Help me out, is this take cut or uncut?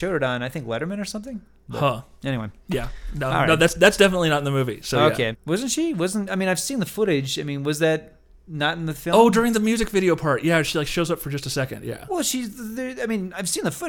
cut